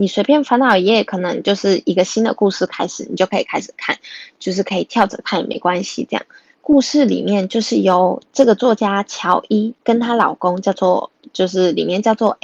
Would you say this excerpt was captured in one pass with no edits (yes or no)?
no